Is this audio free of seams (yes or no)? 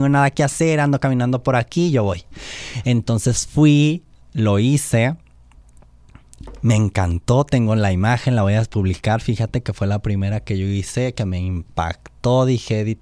yes